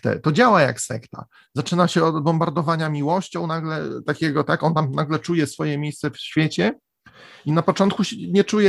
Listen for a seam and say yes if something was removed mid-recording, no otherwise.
yes